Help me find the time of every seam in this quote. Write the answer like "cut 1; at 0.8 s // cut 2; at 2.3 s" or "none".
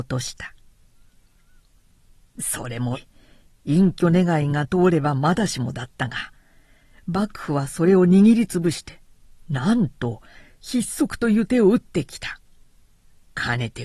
cut 1; at 2.9 s